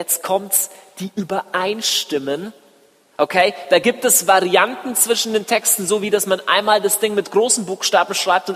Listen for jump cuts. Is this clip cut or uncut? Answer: uncut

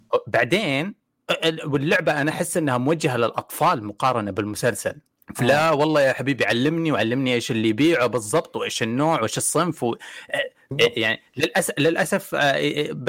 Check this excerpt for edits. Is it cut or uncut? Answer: cut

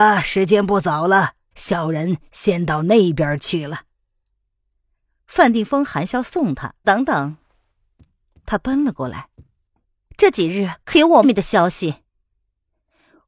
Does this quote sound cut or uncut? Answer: cut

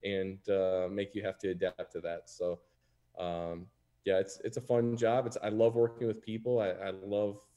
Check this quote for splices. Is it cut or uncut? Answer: uncut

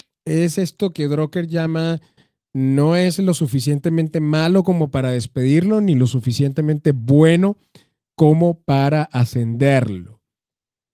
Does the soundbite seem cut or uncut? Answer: uncut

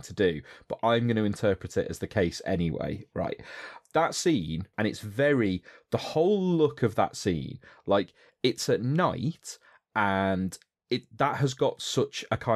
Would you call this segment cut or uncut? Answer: cut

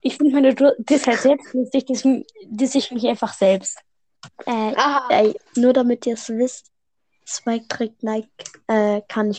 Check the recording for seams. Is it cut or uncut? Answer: uncut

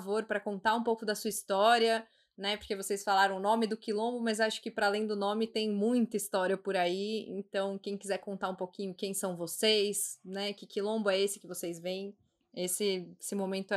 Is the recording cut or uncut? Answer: uncut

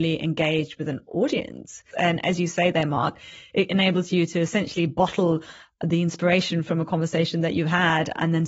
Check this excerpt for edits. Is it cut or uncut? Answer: cut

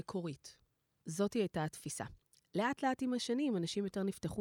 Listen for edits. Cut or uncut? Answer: cut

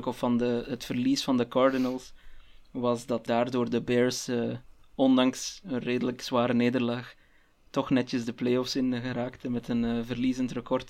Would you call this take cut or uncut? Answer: cut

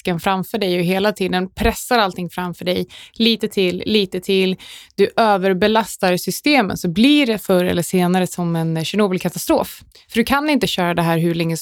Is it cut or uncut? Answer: uncut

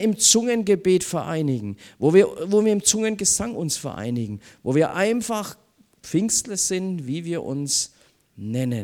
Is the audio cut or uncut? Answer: uncut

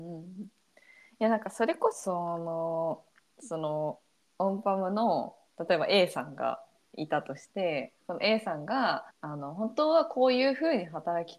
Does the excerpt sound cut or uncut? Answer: cut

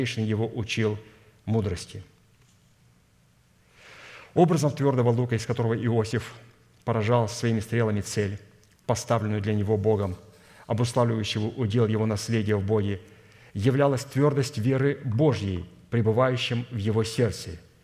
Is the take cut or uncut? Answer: uncut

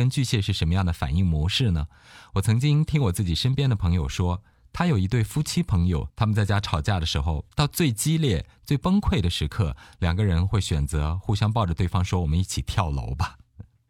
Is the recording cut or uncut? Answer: cut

